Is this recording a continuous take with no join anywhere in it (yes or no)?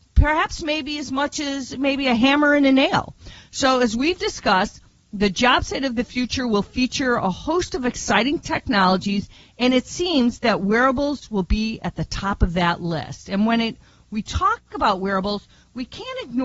yes